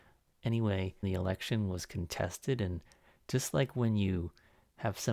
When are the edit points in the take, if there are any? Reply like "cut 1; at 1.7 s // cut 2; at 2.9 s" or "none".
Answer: cut 1; at 1.0 s